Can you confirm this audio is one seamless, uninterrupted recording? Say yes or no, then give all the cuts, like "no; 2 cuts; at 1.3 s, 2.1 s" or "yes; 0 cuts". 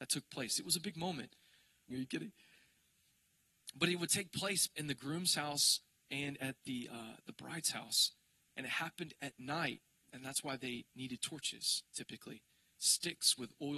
no; 1 cut; at 1.9 s